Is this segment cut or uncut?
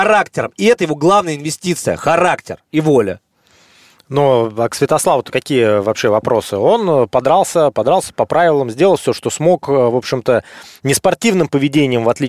uncut